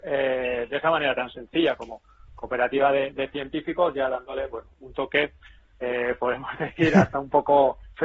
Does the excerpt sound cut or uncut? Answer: uncut